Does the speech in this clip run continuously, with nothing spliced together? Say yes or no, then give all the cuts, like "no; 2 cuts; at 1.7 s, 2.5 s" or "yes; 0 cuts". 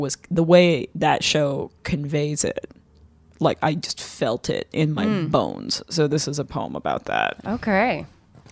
yes; 0 cuts